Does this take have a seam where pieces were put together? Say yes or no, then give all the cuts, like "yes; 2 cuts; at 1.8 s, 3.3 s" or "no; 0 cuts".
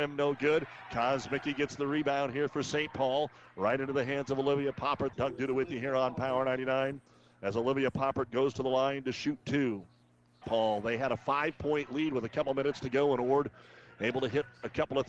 yes; 2 cuts; at 5.1 s, 10.4 s